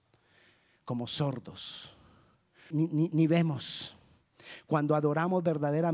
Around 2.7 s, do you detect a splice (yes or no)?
yes